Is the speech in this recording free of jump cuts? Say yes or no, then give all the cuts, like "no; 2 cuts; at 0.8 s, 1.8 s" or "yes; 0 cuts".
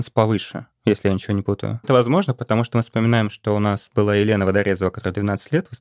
no; 1 cut; at 1.8 s